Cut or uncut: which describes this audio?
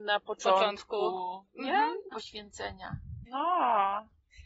cut